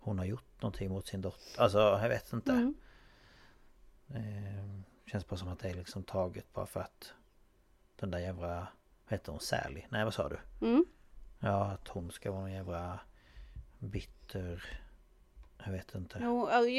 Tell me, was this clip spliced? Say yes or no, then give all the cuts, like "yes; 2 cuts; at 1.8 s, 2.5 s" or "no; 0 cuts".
no; 0 cuts